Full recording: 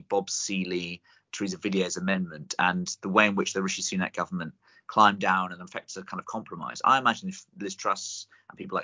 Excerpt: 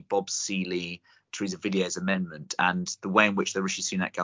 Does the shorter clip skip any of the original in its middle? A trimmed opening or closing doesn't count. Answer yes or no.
no